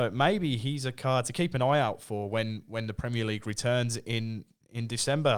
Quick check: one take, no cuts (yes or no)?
yes